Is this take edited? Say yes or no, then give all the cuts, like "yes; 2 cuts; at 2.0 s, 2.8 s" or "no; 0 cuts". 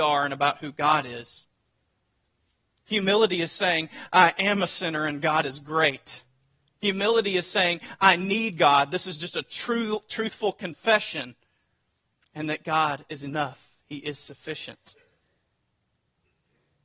no; 0 cuts